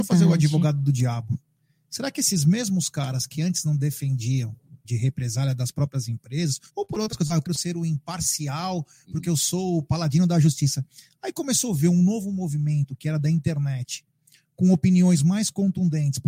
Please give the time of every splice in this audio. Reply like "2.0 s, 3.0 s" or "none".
4.8 s, 6.7 s